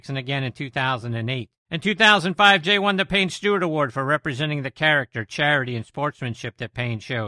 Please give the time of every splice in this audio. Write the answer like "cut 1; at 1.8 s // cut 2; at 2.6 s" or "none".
cut 1; at 1.6 s

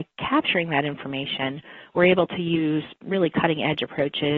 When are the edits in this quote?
none

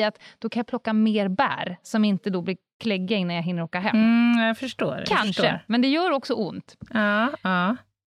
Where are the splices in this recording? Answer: none

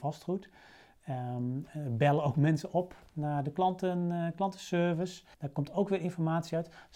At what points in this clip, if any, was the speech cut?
cut 1; at 5.3 s

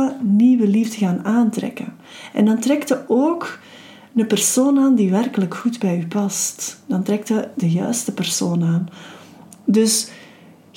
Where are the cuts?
none

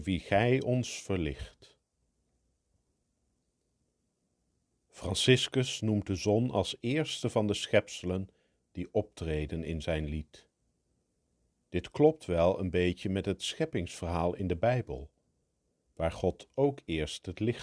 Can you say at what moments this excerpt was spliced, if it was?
none

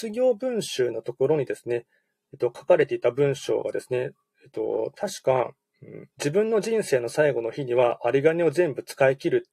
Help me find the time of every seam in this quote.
cut 1; at 6.1 s

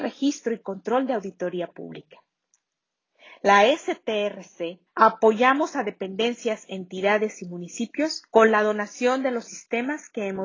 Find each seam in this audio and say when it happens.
cut 1; at 4.9 s // cut 2; at 8.3 s

